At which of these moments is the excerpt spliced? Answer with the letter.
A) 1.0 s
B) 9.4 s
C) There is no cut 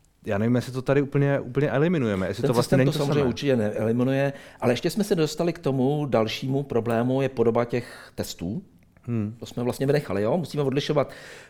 C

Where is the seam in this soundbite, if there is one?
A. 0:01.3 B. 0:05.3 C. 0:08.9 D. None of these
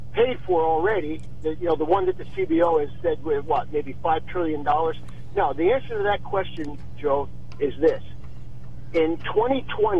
D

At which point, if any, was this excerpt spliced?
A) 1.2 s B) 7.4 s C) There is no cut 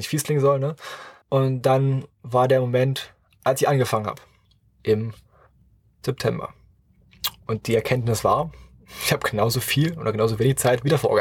A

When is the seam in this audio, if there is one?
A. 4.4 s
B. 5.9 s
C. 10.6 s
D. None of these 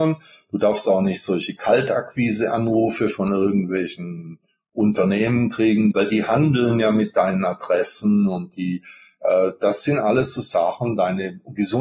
B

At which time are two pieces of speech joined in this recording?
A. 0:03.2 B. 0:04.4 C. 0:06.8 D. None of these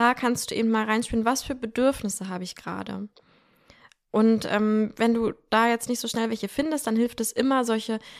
D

